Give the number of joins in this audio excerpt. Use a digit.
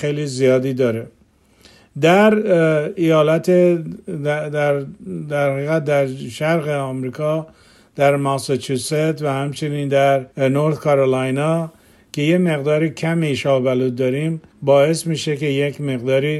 2